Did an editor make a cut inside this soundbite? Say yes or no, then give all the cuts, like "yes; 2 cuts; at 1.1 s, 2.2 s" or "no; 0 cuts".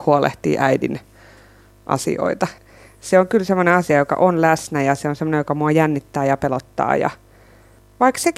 no; 0 cuts